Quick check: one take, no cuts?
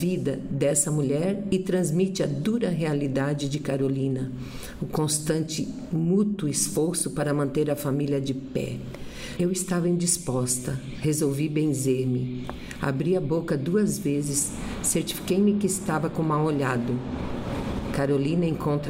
no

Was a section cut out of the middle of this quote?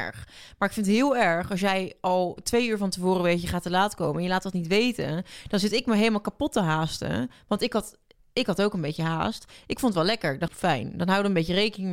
yes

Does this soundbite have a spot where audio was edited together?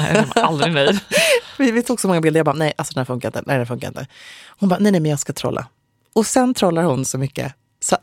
no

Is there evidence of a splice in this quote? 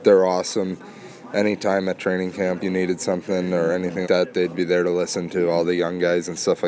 yes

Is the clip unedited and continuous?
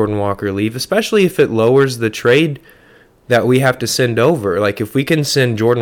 yes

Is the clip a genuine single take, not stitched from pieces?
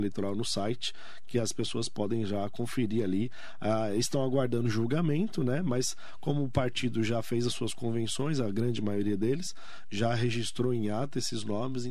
yes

